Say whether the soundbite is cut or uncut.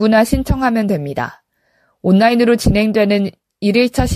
uncut